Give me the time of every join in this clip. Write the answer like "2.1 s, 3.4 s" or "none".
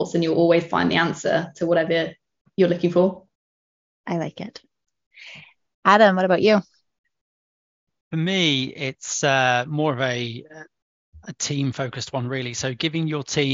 none